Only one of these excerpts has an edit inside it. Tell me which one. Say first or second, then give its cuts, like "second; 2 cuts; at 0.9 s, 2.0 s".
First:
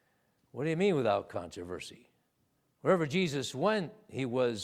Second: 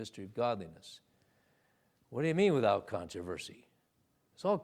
first; 1 cut; at 2.7 s